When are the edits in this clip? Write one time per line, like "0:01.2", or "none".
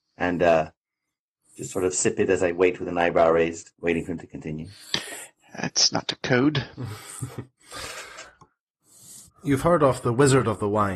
0:09.2